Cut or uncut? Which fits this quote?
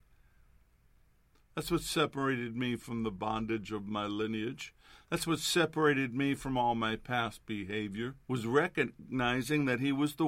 cut